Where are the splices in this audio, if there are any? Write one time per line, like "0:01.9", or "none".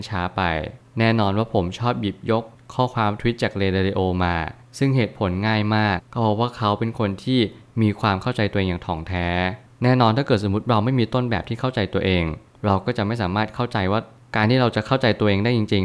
0:06.0